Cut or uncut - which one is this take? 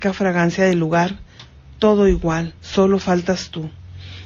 cut